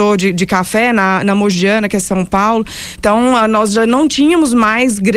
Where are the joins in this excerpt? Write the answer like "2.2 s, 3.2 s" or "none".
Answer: 3.0 s